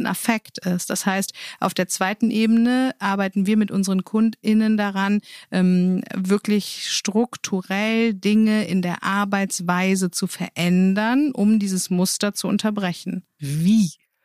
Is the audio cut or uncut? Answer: uncut